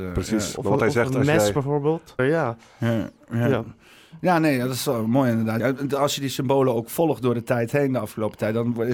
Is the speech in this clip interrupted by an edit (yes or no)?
yes